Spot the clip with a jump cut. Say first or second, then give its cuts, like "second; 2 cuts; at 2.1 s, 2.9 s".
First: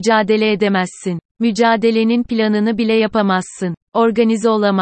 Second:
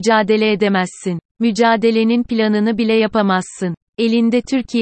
second; 1 cut; at 3.9 s